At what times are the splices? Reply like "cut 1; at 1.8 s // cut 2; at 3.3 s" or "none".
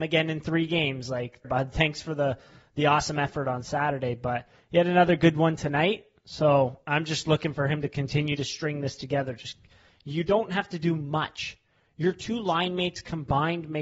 cut 1; at 1.4 s